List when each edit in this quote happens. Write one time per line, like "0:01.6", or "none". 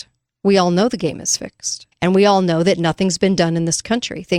0:01.9